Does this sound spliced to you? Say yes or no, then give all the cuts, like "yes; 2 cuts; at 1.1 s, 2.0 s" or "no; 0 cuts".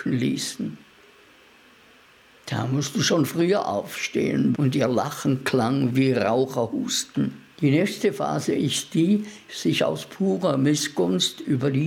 yes; 3 cuts; at 4.5 s, 7.5 s, 9.5 s